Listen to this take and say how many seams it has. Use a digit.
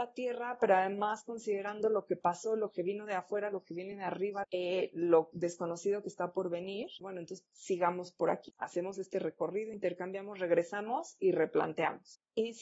2